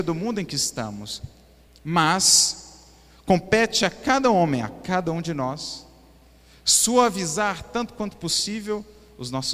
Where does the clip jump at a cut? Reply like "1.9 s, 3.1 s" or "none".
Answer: 1.7 s